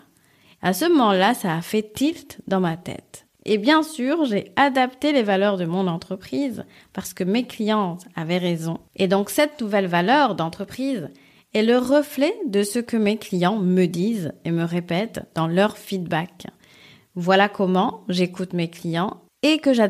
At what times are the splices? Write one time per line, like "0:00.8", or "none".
none